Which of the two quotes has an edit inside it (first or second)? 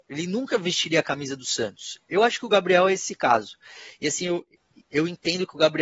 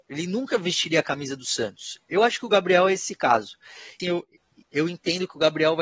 second